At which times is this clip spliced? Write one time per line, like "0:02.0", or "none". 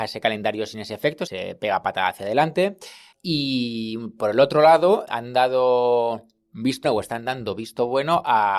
0:03.1
0:06.8